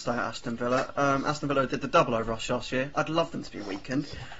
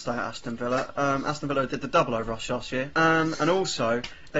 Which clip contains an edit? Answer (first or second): second